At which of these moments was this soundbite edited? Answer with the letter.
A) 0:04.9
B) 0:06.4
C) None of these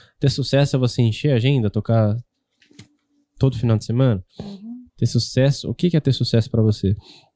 A